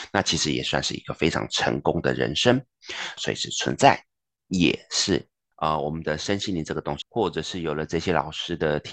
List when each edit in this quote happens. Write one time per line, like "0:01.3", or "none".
0:03.2
0:05.5
0:07.0